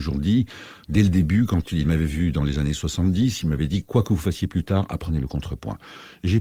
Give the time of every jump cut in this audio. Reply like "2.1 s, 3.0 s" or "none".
none